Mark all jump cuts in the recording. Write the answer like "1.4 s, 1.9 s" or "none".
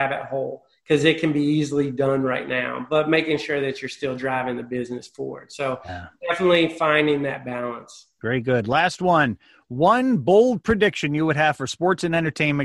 none